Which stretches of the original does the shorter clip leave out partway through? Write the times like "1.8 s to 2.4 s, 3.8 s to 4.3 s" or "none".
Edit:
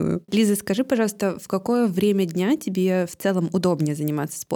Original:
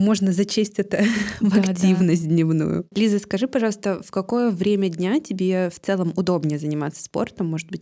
none